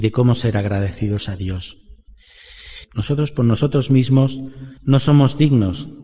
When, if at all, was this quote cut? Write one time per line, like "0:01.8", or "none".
0:02.8
0:04.8